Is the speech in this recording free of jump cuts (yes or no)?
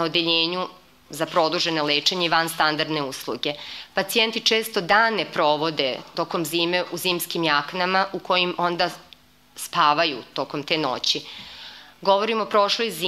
yes